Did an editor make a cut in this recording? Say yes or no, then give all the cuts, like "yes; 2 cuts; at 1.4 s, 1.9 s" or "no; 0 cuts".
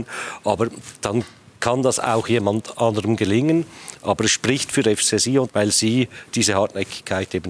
yes; 1 cut; at 5.5 s